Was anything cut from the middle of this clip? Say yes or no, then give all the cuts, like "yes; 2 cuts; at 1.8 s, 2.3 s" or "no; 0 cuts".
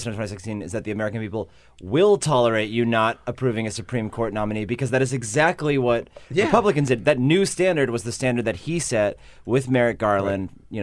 no; 0 cuts